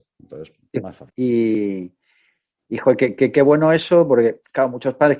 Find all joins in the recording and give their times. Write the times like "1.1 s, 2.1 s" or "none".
1.1 s